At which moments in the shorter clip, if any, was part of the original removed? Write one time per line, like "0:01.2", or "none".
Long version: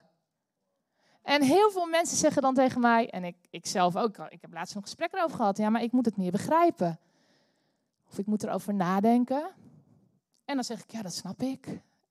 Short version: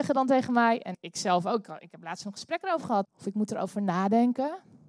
0:00.9
0:03.0